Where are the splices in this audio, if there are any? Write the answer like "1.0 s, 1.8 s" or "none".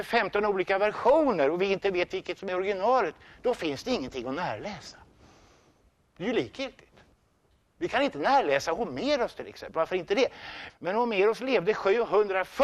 10.7 s